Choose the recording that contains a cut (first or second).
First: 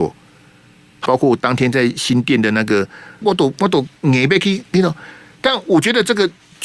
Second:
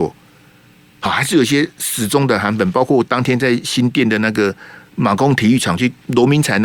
first